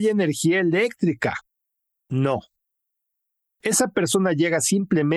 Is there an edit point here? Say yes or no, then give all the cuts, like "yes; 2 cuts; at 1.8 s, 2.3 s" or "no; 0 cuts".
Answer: no; 0 cuts